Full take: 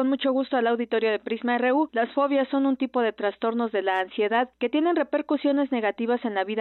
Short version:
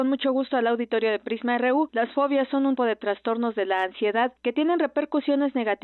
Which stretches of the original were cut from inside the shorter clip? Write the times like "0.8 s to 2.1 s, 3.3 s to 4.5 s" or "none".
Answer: 2.8 s to 2.9 s